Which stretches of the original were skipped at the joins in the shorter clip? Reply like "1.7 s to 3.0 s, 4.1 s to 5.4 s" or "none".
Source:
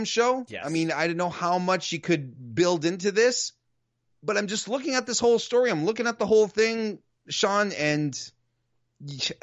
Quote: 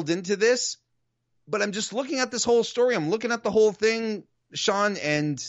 none